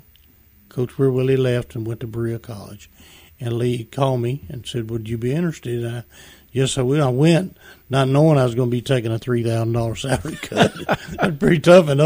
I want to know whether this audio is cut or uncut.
uncut